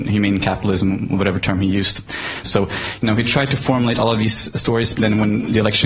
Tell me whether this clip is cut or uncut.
cut